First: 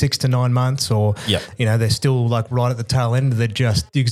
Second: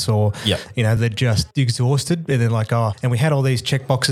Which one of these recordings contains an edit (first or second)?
second